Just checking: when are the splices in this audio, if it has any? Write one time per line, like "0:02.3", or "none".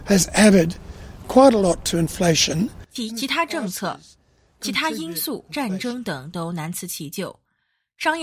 0:03.1
0:05.5